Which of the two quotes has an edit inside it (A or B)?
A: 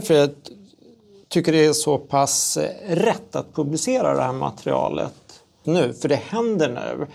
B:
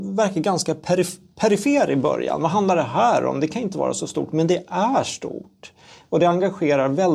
A